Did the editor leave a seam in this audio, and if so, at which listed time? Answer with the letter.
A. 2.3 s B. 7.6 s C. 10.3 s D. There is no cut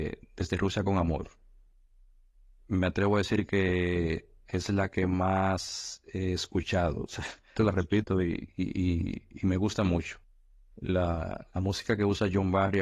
B